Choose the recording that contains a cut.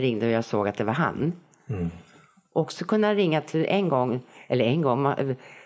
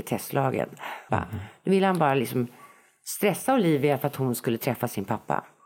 second; 1 cut; at 1.1 s

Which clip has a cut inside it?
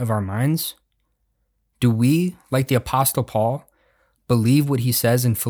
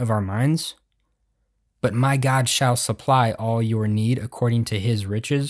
second; 1 cut; at 1.7 s

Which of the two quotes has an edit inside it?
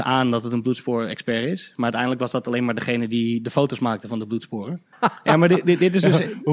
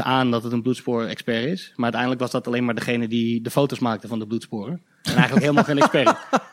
first; 1 cut; at 4.9 s

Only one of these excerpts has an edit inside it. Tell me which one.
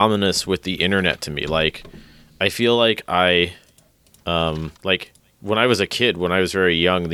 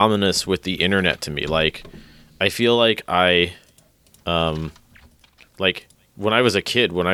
first; 1 cut; at 4.8 s

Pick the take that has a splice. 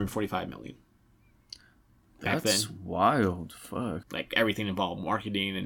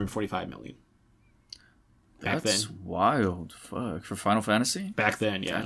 first; 1 cut; at 4.0 s

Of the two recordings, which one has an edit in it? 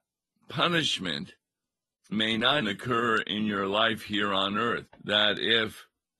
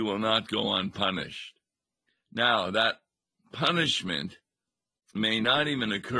first; 2 cuts; at 2.6 s, 4.9 s

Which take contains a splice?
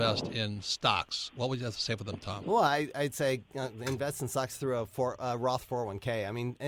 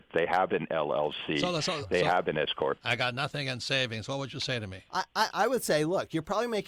second; 1 cut; at 2.8 s

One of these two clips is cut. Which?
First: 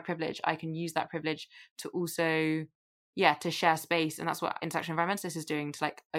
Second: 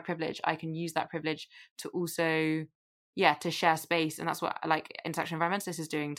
first; 1 cut; at 4.6 s

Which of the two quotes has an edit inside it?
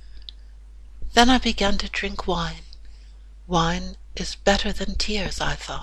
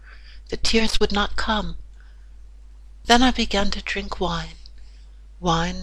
second; 1 cut; at 3.0 s

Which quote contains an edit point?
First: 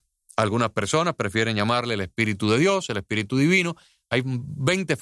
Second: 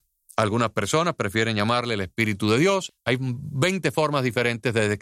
second; 1 cut; at 2.9 s

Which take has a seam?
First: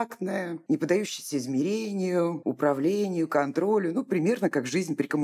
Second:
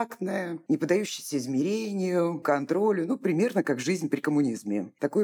second; 1 cut; at 2.4 s

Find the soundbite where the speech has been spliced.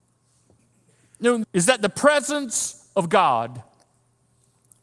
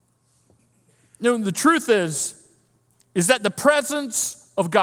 first; 1 cut; at 1.4 s

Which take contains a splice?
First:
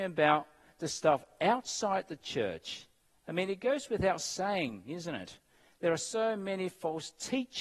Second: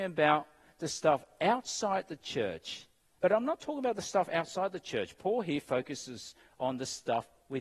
second; 1 cut; at 3.2 s

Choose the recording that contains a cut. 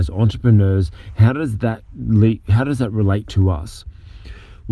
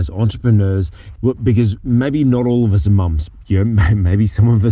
second; 1 cut; at 1.2 s

